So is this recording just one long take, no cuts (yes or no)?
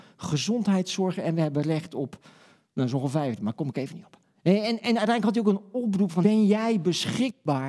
no